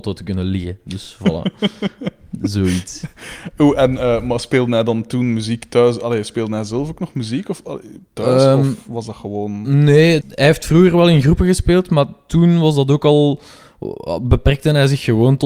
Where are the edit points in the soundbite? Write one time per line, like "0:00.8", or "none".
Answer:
0:10.2